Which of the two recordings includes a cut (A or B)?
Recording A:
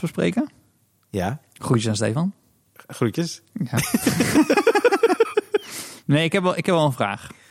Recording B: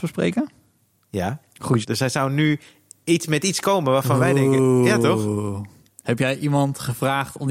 B